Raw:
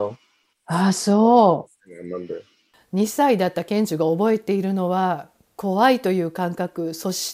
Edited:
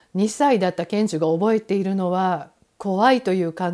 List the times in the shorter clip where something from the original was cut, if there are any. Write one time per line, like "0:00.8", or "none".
none

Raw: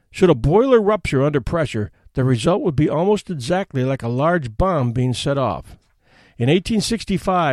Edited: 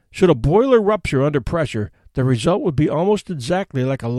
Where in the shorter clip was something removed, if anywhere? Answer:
none

